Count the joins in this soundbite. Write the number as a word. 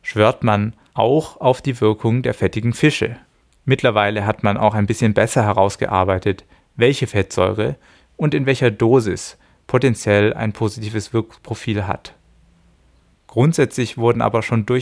one